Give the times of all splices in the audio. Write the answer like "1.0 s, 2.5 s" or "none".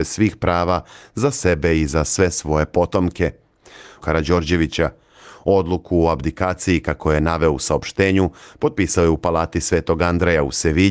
4.0 s